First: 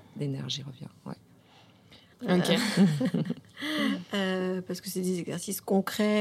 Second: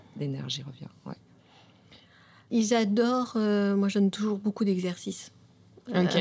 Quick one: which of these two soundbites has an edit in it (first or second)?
first